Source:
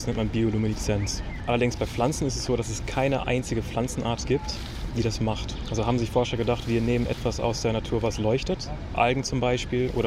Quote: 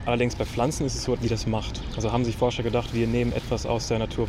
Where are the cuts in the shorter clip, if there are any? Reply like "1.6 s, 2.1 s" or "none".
1.2 s

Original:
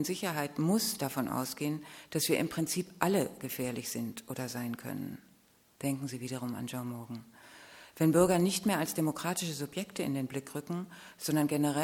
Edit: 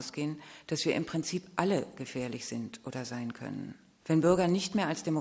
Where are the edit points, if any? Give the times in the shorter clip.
4.0 s

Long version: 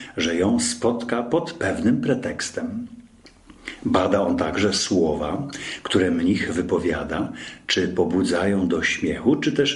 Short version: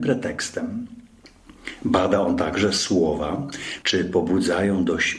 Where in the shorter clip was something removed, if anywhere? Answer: 3.8 s

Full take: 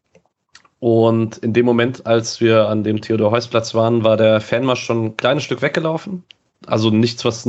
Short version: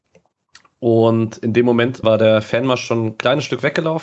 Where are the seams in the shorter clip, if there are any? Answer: 2.0 s

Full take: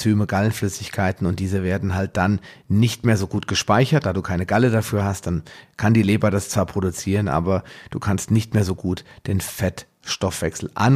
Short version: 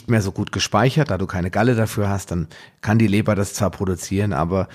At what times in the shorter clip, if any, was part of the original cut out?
none

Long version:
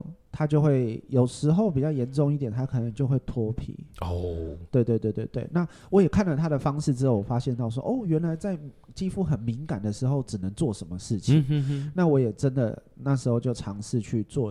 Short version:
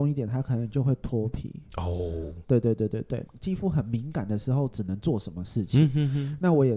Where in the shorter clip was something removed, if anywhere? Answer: 3.3 s

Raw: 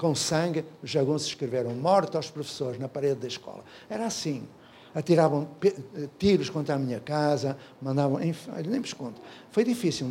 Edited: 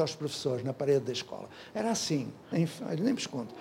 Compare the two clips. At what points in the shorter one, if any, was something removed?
2.5 s

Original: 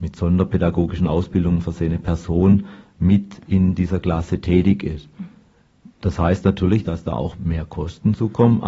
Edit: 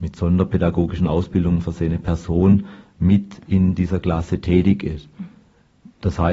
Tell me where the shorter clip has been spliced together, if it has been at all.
none

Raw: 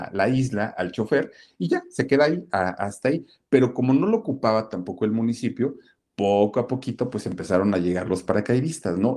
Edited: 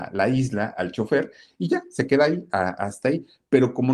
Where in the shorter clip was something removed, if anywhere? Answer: none

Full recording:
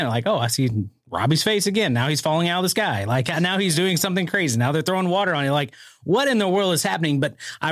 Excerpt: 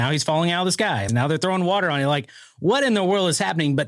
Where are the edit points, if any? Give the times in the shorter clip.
1.1 s

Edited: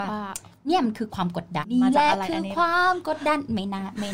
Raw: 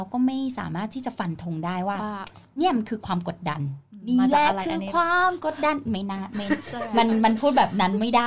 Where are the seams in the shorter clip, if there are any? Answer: 1.6 s

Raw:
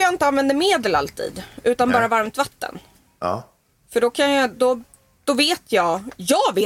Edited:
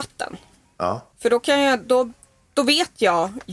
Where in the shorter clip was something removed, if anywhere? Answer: 1.1 s

